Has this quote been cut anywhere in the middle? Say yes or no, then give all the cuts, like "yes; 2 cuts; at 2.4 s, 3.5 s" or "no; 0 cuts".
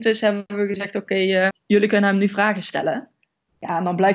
yes; 1 cut; at 1.5 s